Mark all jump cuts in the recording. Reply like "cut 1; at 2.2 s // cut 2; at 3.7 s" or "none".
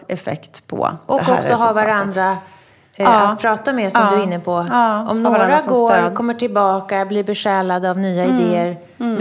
none